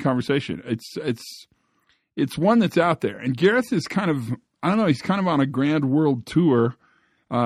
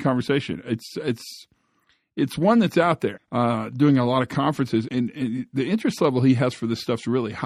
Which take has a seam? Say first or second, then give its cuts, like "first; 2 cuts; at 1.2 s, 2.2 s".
second; 2 cuts; at 3.2 s, 4.9 s